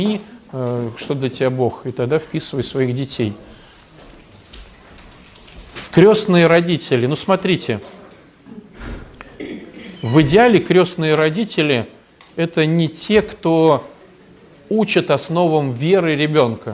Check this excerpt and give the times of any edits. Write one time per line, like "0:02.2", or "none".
0:05.9